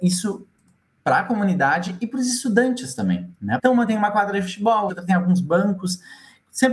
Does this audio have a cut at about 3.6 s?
yes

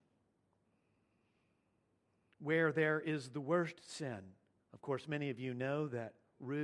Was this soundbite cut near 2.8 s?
no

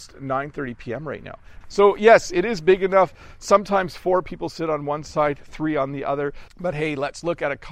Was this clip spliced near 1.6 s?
yes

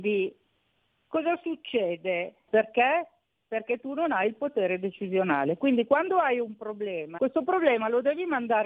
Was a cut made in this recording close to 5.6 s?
no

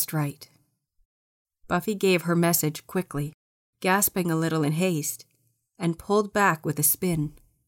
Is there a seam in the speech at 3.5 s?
no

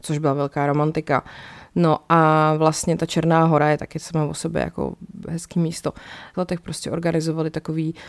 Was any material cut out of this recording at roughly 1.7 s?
no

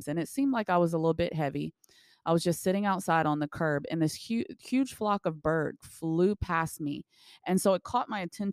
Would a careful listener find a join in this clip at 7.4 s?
no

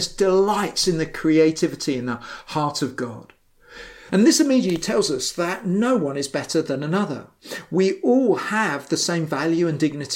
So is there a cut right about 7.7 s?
no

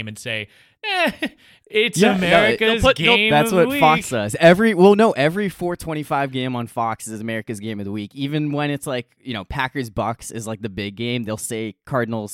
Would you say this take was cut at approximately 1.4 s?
no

